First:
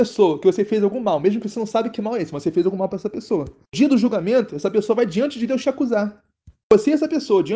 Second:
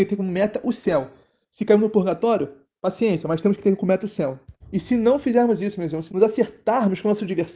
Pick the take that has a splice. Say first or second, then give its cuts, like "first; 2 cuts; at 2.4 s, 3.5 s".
second; 2 cuts; at 4.6 s, 6.1 s